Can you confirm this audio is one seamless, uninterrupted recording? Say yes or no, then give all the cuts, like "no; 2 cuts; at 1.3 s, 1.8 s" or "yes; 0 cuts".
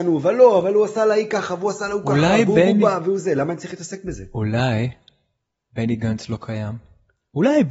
yes; 0 cuts